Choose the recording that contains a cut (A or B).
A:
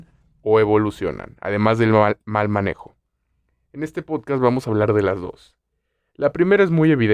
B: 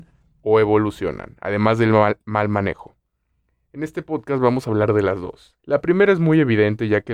B